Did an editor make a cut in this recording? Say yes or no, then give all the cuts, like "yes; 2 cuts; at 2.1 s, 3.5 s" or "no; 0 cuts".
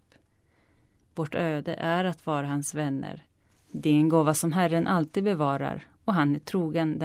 yes; 1 cut; at 1.0 s